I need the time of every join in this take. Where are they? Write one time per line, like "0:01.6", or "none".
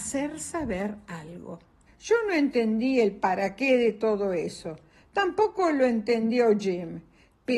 0:01.9

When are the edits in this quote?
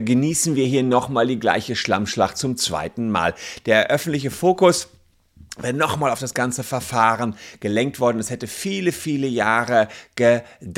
none

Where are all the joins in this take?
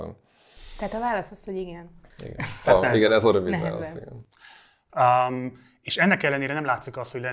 0:04.9

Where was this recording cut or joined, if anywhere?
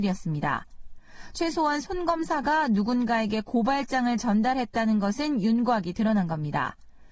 none

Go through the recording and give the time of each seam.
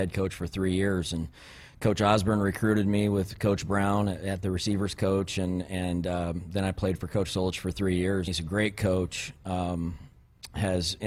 0:08.3

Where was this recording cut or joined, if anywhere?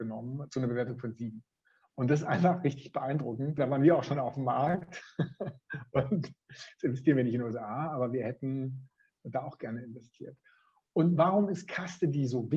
0:03.6

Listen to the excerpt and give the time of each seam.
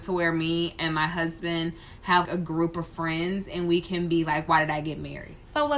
0:02.2

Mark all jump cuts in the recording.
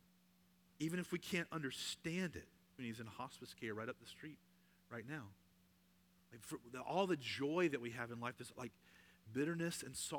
0:02.8
0:08.5

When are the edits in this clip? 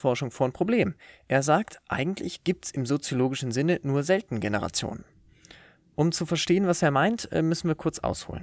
none

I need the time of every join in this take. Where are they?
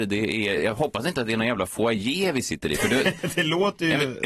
none

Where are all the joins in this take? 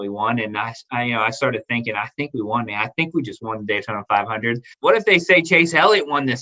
0:04.7

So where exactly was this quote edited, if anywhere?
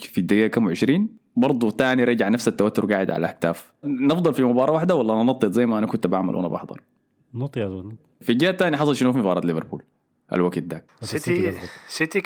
0:03.8

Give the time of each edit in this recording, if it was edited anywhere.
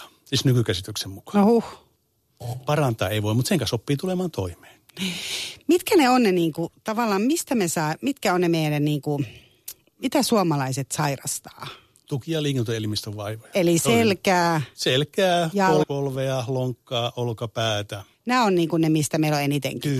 0:15.8
0:18.1

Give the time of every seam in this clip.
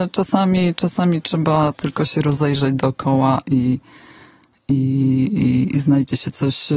none

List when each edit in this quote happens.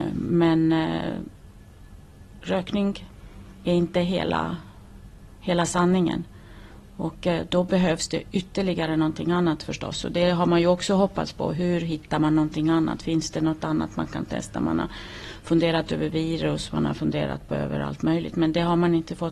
none

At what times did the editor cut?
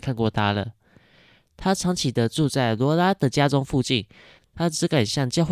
0:04.4

